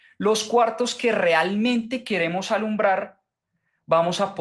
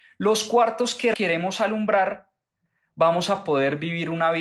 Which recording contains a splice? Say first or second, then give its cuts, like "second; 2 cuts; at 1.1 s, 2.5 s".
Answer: second; 1 cut; at 1.1 s